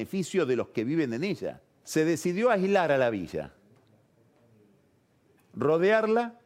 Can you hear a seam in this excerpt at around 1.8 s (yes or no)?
yes